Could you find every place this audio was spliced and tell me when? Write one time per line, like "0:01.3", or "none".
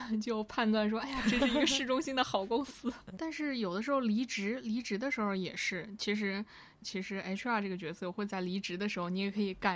0:03.1
0:06.8